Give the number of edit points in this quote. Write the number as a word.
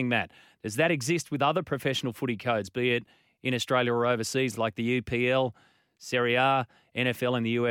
zero